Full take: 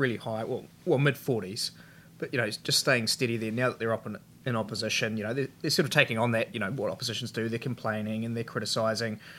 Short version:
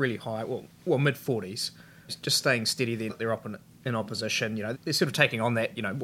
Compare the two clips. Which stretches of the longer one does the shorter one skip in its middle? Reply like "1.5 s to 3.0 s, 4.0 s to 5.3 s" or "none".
2.1 s to 2.5 s, 3.5 s to 3.7 s, 5.3 s to 5.5 s